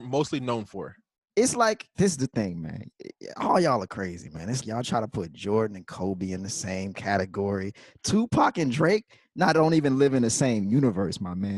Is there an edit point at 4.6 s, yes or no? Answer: yes